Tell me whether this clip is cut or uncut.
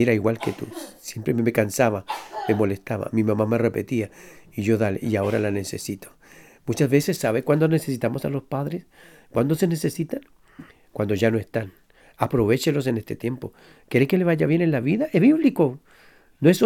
uncut